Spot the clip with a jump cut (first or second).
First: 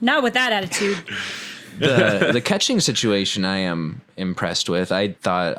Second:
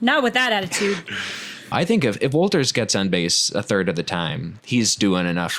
second